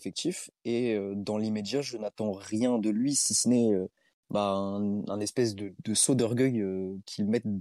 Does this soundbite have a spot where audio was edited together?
yes; 1 cut; at 5.8 s

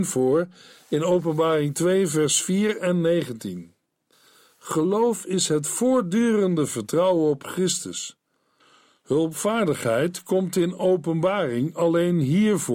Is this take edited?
no; 0 cuts

